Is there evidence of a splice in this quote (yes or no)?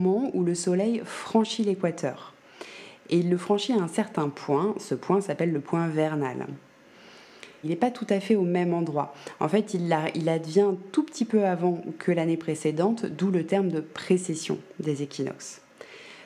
yes